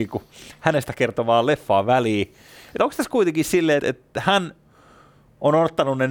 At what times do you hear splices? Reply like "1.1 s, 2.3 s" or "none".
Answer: 3.8 s